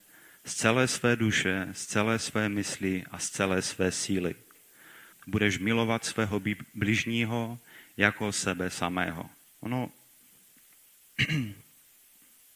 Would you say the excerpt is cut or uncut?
cut